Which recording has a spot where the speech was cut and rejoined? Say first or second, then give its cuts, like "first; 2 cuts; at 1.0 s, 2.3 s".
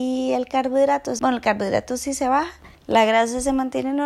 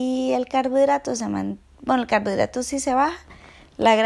first; 2 cuts; at 1.2 s, 2.8 s